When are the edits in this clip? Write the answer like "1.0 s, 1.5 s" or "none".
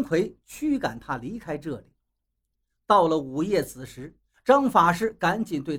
4.3 s

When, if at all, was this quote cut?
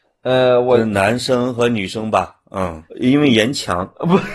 2.9 s

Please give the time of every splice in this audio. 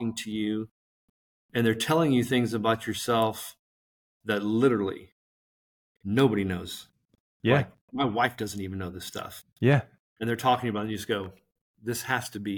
none

